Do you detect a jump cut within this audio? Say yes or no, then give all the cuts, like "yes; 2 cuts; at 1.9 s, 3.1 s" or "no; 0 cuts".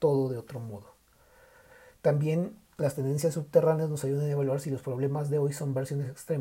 no; 0 cuts